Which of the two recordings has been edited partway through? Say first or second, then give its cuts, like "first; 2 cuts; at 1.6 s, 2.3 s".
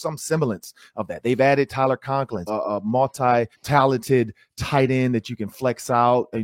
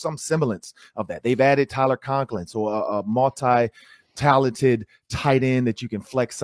first; 2 cuts; at 2.5 s, 3.5 s